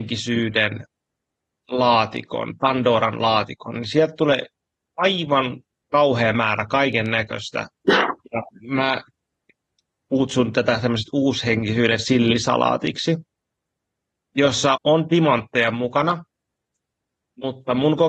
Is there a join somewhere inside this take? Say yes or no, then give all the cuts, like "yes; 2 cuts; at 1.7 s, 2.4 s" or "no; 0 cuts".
yes; 1 cut; at 14.8 s